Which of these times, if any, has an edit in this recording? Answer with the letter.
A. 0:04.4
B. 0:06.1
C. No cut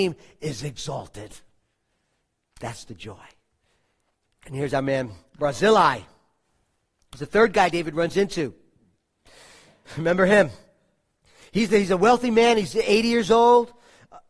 A